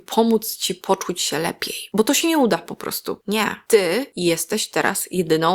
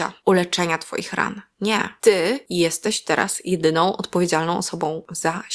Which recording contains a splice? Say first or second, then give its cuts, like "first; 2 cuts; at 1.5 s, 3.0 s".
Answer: first; 1 cut; at 3.2 s